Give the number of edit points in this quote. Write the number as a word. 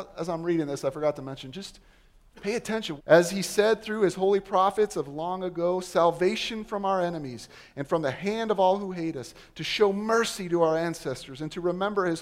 one